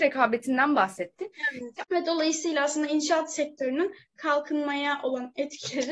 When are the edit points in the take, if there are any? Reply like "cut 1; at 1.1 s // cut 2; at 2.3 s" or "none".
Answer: cut 1; at 1.8 s